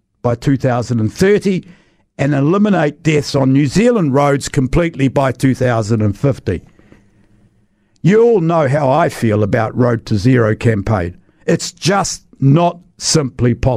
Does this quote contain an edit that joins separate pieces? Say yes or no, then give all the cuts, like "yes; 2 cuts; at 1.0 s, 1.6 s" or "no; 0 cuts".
no; 0 cuts